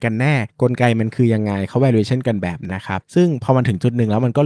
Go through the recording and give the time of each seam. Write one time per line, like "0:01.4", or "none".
0:02.7